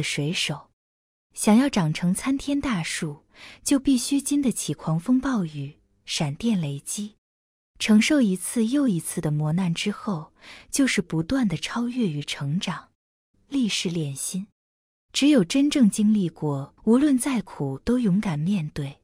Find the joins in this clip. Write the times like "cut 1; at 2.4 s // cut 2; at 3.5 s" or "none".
cut 1; at 13.3 s // cut 2; at 16.8 s